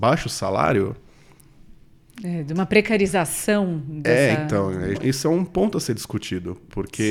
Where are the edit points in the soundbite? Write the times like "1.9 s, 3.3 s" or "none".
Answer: 4.9 s